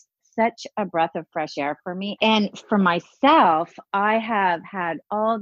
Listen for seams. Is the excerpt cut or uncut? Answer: cut